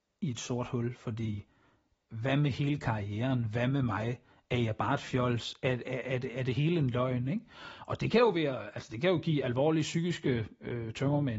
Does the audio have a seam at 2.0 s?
no; 0 cuts

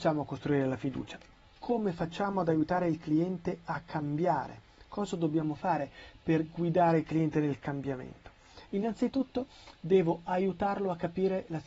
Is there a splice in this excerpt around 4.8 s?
no; 0 cuts

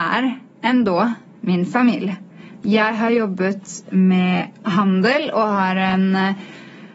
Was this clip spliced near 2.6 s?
yes; 1 cut; at 2.6 s

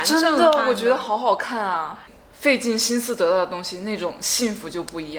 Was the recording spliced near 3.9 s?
no; 1 cut; at 2.1 s

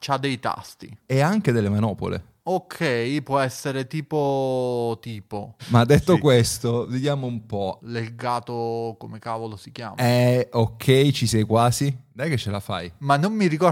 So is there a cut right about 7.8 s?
yes; 2 cuts; at 5.6 s, 7.8 s

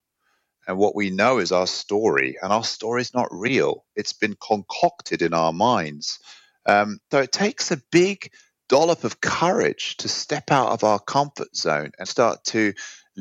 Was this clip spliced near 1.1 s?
no; 2 cuts; at 7.1 s, 12.0 s

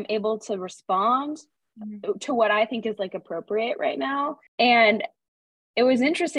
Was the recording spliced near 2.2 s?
no; 1 cut; at 4.5 s

